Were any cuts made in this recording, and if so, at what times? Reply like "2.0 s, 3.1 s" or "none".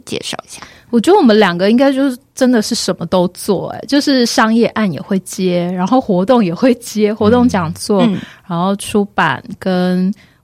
none